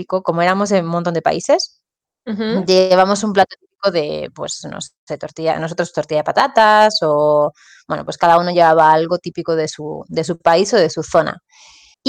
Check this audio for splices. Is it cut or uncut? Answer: uncut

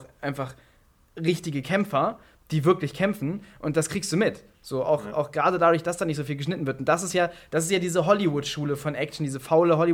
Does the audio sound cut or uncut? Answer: uncut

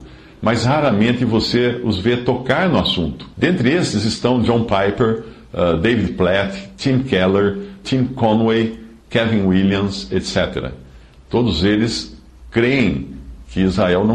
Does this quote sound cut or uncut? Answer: cut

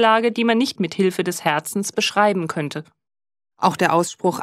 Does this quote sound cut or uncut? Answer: cut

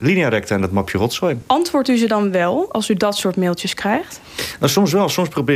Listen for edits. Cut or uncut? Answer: uncut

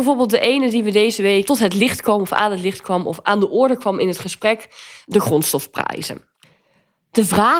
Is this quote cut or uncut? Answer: uncut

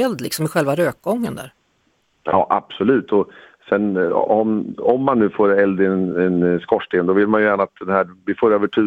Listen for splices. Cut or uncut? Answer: uncut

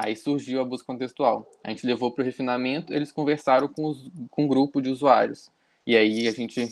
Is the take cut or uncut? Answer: uncut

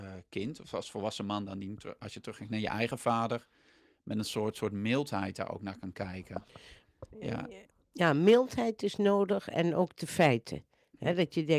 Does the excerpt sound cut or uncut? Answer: uncut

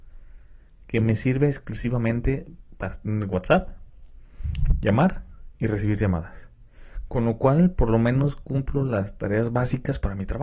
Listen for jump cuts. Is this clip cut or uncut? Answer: uncut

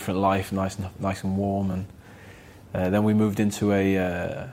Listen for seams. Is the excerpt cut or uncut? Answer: uncut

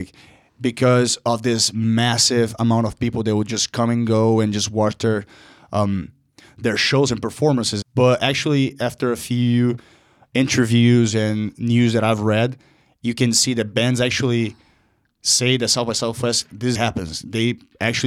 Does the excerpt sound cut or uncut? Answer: cut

